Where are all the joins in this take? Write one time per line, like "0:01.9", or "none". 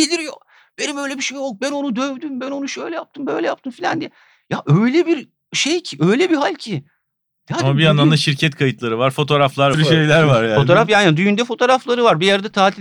0:09.7

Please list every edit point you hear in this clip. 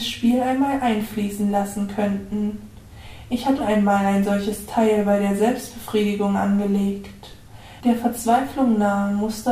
0:03.6
0:07.8

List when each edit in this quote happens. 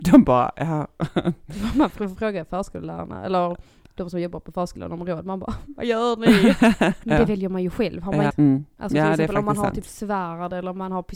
0:07.0
0:08.3

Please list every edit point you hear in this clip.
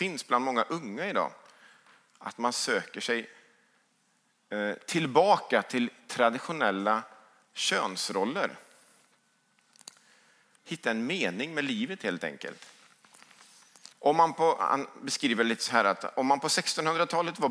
0:10.6
0:13.9

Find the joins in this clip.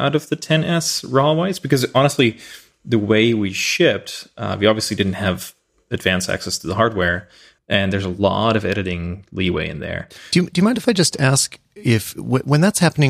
0:07.6

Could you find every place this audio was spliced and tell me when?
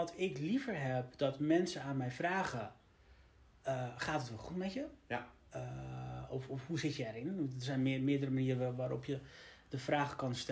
none

